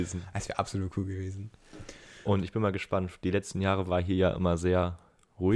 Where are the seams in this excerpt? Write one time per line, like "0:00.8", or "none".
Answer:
0:02.2